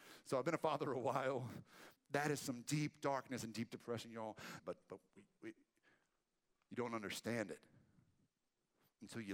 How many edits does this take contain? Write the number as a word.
two